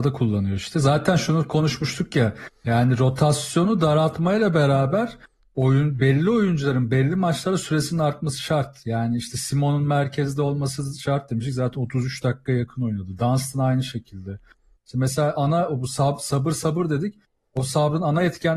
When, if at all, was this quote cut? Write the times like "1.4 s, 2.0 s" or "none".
14.8 s